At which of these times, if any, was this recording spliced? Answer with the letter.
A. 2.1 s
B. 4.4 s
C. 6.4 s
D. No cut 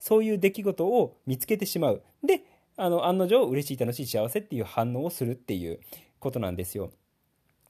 D